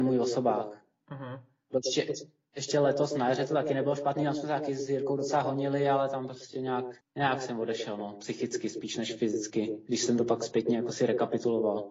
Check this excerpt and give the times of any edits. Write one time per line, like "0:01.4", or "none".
none